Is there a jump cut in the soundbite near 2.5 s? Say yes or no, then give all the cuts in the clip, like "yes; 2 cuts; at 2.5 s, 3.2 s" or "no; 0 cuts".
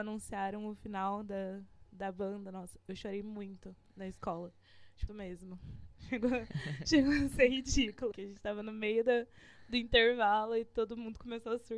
no; 2 cuts; at 5.1 s, 8.1 s